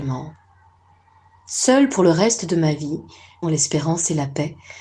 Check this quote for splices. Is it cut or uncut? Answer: cut